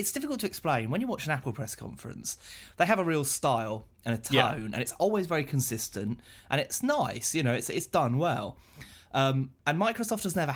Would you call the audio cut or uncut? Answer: uncut